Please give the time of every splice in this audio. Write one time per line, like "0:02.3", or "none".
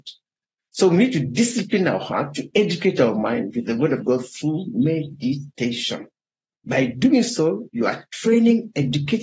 none